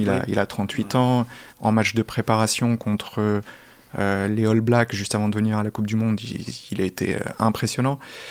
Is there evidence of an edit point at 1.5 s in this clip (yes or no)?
yes